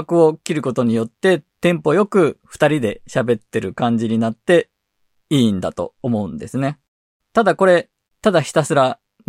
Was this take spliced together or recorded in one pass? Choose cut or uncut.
cut